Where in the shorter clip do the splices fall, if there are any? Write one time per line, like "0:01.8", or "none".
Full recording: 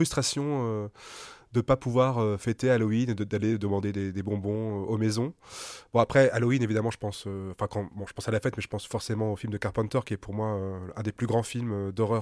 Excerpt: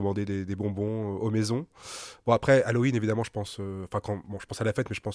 none